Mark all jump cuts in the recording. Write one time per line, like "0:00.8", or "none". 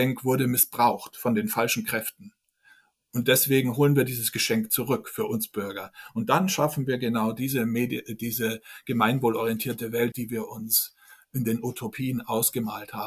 0:10.1